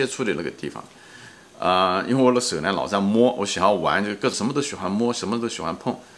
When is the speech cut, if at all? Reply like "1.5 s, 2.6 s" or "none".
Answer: 4.3 s